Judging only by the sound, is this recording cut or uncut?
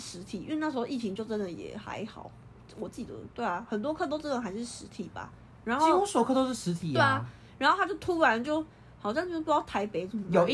uncut